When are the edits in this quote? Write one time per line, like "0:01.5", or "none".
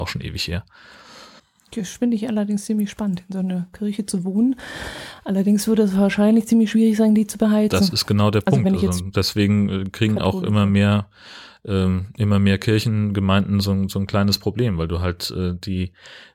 none